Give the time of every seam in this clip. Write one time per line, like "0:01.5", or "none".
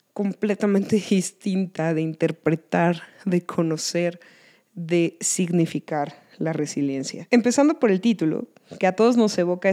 none